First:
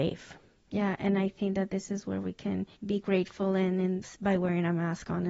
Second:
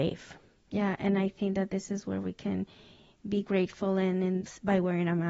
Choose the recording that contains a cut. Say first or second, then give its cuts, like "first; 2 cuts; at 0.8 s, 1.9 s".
first; 1 cut; at 2.7 s